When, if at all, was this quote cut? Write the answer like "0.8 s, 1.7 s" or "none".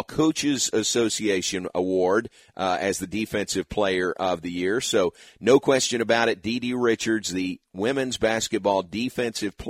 none